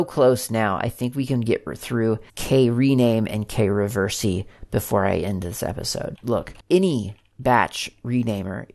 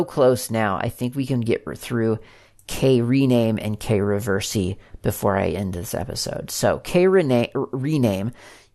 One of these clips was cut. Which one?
first; 2 cuts; at 2.3 s, 6.2 s

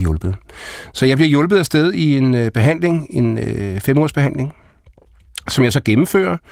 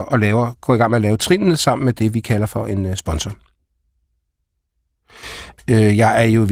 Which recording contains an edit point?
second; 1 cut; at 5.5 s

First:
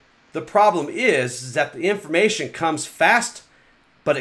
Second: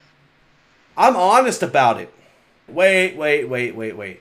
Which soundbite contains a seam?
second; 1 cut; at 2.7 s

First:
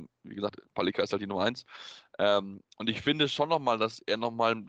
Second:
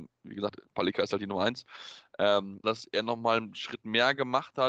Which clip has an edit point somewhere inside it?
second; 1 cut; at 2.6 s

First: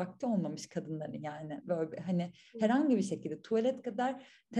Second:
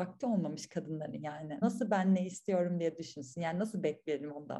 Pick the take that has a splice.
second; 1 cut; at 1.6 s

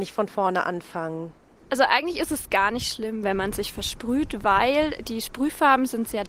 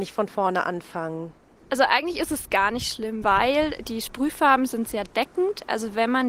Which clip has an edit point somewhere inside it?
second; 1 cut; at 3.2 s

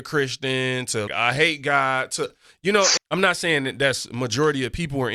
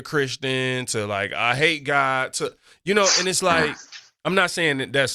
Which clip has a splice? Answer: first; 2 cuts; at 1.1 s, 3.0 s

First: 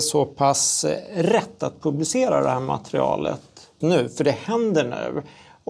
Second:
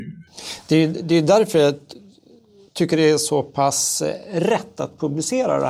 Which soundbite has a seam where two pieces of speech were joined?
first; 1 cut; at 3.8 s

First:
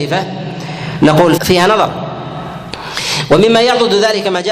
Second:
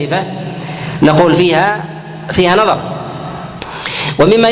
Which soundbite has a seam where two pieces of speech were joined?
first; 1 cut; at 1.4 s

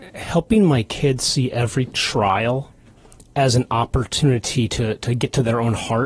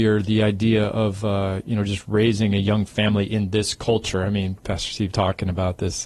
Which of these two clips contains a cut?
second; 1 cut; at 5.1 s

